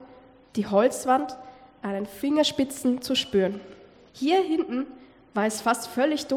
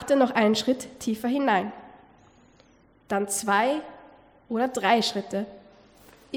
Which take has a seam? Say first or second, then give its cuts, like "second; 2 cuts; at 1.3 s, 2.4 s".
first; 1 cut; at 4.1 s